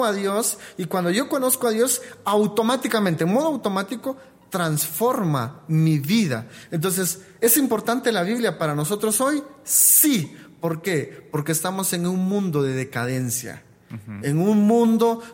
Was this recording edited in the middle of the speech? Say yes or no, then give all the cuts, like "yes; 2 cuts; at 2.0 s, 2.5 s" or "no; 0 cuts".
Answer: no; 0 cuts